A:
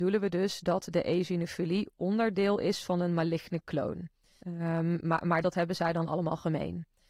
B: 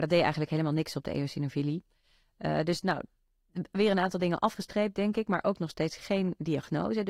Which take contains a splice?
A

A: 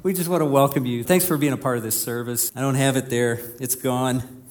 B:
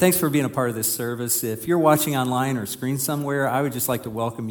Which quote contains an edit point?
A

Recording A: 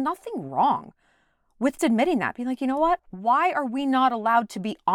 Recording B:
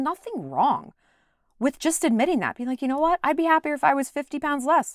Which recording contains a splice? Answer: A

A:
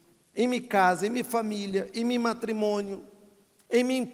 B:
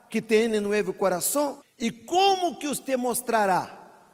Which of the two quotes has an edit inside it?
B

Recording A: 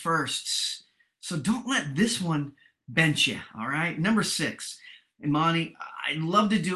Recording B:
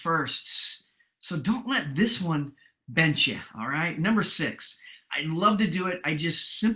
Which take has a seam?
B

